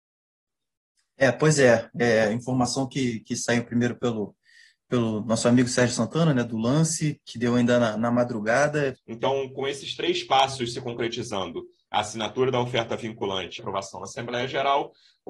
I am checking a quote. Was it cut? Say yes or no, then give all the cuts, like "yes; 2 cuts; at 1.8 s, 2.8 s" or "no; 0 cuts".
yes; 2 cuts; at 8.9 s, 13.6 s